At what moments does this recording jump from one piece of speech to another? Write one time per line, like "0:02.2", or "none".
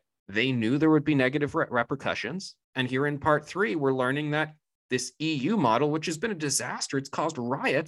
0:02.6